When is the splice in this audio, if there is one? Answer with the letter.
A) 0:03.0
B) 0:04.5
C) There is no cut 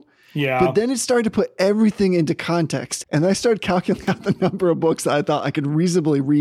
A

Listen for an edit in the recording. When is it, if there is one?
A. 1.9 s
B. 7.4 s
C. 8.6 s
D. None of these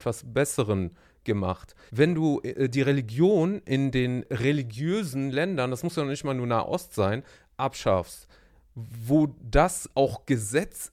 A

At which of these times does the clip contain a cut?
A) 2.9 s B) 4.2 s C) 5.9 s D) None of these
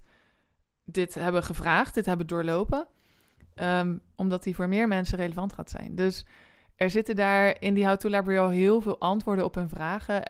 B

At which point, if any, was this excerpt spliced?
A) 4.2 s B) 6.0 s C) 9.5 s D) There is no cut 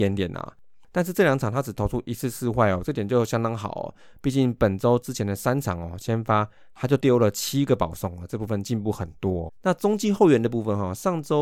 C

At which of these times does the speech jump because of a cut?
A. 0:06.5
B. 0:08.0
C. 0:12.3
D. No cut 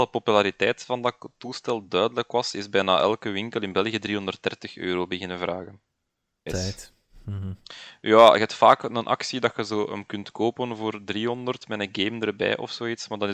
A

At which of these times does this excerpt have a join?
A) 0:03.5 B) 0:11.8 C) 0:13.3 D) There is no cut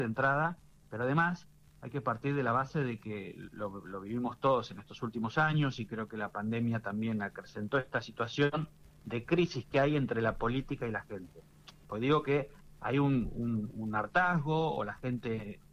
B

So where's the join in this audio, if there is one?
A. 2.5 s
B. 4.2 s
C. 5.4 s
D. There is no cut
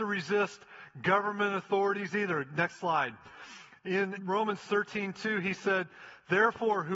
B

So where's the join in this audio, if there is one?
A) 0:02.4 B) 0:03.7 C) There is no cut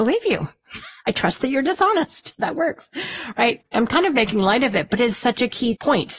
C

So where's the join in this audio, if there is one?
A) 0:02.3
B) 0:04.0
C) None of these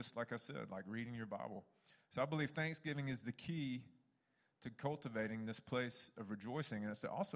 C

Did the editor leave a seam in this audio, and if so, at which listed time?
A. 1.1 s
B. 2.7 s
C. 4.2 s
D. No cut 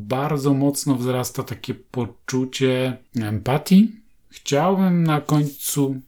C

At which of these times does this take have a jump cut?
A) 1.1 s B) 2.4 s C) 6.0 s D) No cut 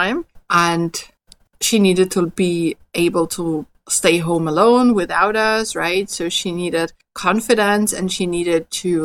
D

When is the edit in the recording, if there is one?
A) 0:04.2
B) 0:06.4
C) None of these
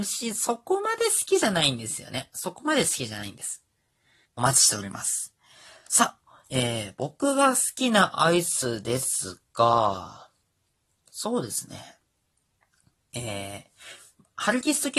A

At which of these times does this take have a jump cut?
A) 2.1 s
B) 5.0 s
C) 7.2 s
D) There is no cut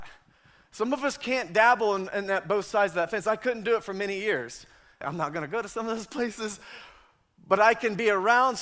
B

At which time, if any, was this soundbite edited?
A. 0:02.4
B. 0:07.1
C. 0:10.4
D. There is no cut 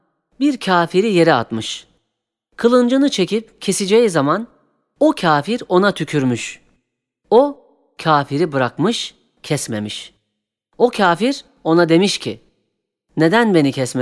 D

